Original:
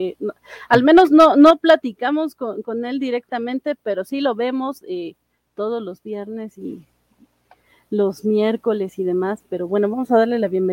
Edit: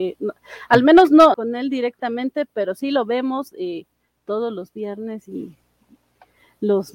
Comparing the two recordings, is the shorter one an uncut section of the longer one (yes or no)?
no